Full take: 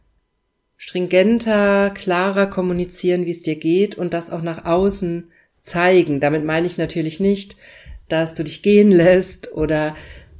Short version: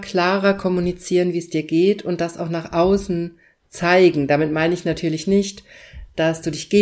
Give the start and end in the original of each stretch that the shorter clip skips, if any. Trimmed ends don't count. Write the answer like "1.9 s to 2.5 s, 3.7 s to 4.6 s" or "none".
none